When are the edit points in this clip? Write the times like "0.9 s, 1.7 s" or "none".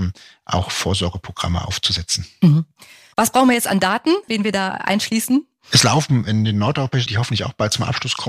3.1 s, 4.3 s, 7.1 s